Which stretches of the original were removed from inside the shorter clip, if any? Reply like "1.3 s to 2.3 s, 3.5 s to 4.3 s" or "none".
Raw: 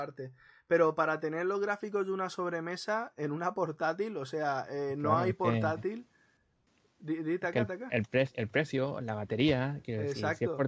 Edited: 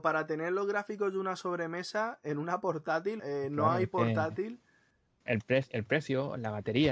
4.1 s to 4.7 s, 6.7 s to 7.9 s